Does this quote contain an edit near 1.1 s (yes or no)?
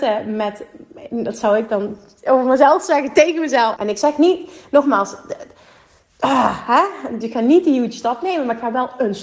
no